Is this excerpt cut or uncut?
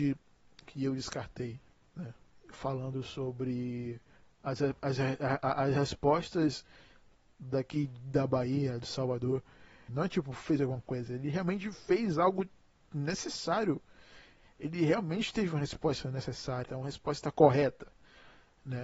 cut